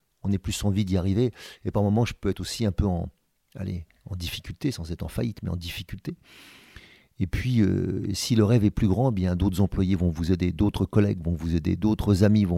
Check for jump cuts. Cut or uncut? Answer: uncut